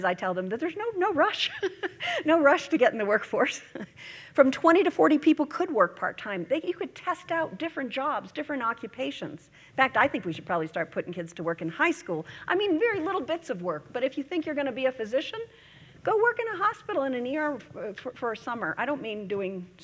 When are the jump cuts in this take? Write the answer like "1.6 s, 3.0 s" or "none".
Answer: none